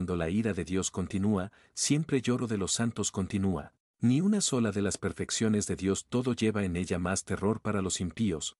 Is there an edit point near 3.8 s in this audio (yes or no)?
yes